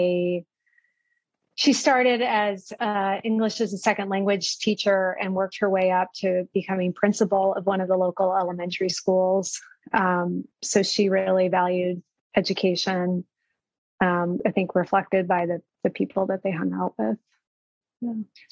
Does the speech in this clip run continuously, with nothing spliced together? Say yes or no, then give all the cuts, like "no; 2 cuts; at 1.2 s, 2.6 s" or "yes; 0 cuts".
no; 1 cut; at 14.4 s